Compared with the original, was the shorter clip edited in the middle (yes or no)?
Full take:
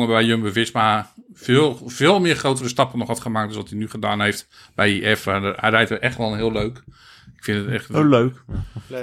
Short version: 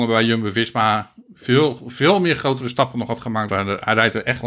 yes